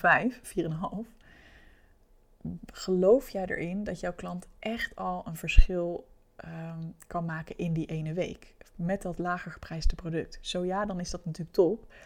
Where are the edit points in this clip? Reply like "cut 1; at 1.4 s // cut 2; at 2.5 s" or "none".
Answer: none